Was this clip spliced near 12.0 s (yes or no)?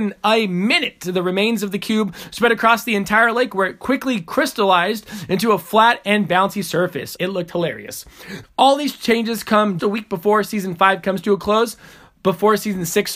no